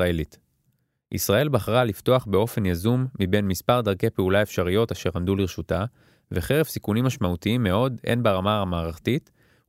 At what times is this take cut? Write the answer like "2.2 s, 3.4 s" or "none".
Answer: none